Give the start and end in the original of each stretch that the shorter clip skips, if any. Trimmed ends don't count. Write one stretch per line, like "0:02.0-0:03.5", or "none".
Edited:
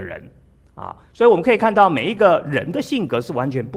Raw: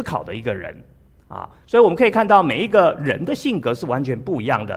none